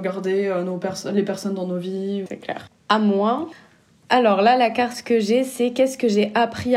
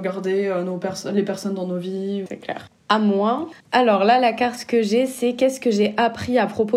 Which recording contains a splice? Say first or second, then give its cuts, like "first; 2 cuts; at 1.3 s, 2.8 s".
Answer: second; 1 cut; at 3.6 s